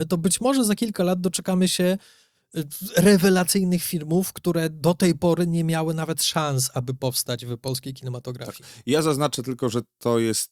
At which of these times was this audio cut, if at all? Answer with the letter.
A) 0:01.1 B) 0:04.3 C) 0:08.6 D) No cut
D